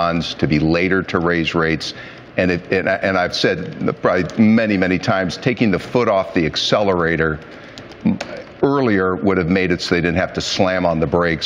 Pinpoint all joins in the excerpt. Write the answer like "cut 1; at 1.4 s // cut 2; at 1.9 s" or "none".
none